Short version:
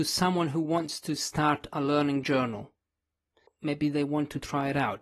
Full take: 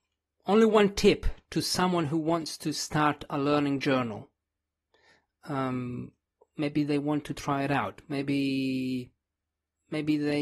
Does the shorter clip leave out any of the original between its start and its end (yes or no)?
yes